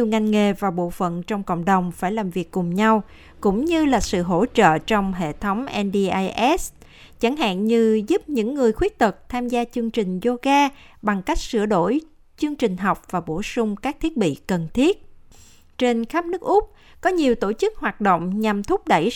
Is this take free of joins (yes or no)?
yes